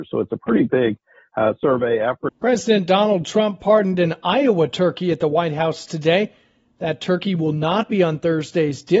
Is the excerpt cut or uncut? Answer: cut